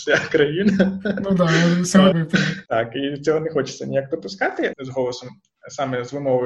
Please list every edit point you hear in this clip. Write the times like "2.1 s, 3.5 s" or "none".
2.1 s, 4.7 s